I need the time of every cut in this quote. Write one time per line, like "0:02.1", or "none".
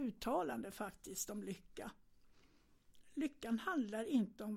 none